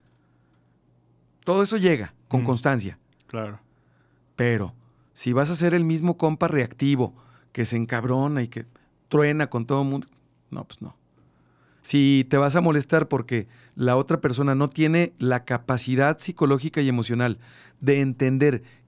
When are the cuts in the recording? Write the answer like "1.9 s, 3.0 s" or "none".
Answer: none